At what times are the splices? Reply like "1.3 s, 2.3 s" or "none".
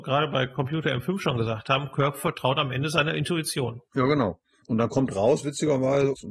none